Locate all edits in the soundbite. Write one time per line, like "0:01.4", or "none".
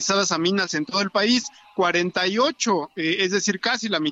none